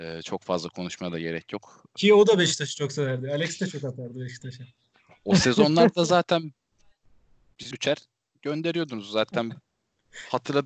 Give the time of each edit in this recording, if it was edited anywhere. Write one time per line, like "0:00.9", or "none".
0:07.7